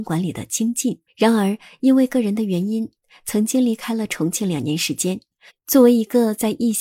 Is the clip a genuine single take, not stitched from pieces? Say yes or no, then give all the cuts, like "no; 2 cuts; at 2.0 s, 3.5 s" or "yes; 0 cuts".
no; 2 cuts; at 1.1 s, 5.5 s